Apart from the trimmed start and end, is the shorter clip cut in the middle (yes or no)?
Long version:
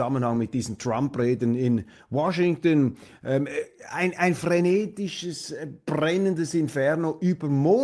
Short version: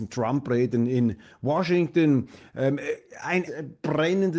yes